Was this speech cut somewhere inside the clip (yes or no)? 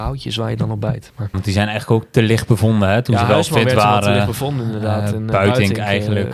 yes